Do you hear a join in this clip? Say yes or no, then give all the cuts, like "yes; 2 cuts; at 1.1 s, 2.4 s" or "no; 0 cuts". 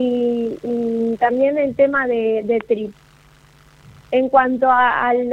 no; 0 cuts